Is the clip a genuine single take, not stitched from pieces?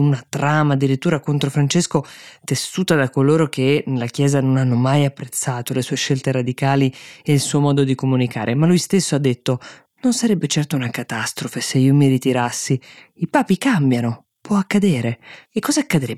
yes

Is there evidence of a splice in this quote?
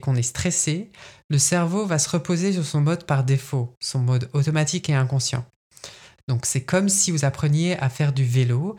yes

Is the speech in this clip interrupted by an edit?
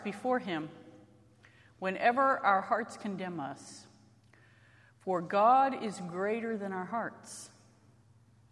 no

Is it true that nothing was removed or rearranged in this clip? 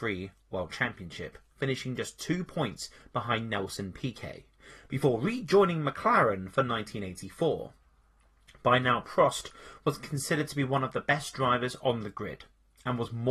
yes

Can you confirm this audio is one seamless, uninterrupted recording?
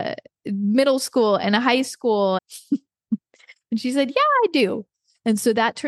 no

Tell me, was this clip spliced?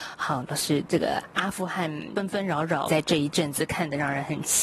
yes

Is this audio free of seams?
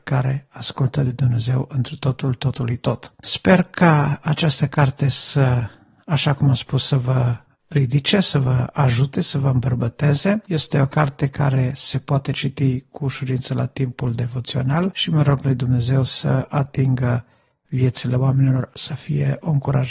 yes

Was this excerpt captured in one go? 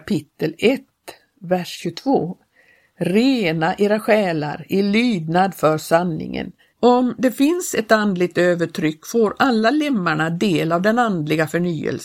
no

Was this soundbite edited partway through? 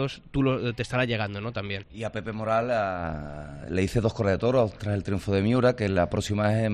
yes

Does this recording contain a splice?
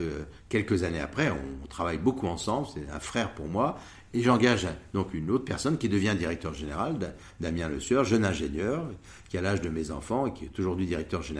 no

